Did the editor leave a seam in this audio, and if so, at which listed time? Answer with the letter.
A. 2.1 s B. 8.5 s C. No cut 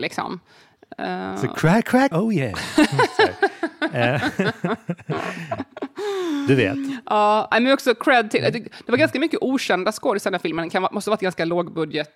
A